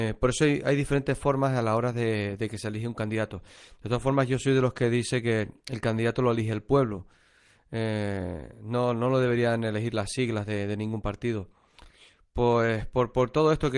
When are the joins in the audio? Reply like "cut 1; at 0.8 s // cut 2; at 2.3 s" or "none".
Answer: none